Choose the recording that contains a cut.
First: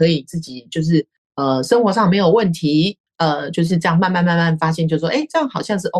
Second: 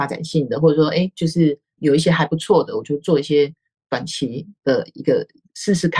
first; 1 cut; at 3.1 s

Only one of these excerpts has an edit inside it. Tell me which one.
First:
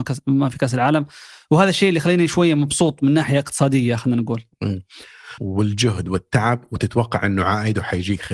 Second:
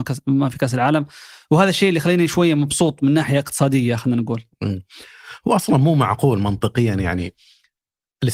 first; 1 cut; at 5.4 s

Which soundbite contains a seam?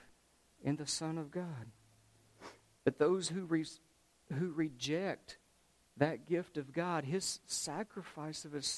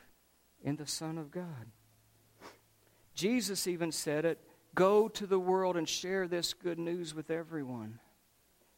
first; 1 cut; at 2.8 s

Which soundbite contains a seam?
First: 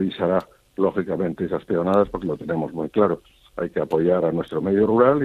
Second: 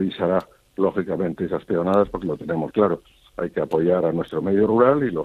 second; 1 cut; at 2.7 s

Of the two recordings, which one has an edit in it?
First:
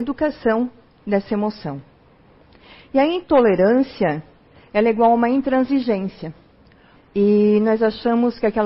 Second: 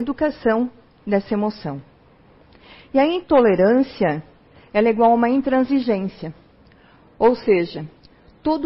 first; 1 cut; at 7.0 s

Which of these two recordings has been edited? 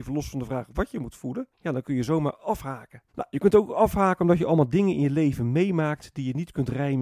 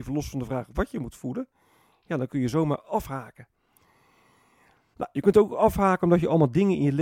first; 2 cuts; at 1.5 s, 3.1 s

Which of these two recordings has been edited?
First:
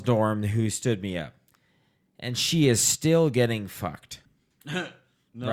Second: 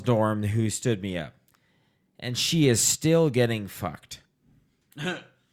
first; 1 cut; at 4.3 s

